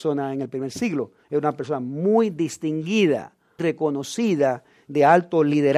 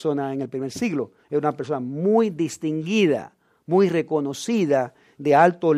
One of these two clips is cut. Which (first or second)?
first